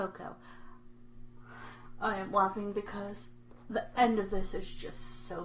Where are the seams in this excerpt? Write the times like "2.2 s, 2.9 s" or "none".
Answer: 1.1 s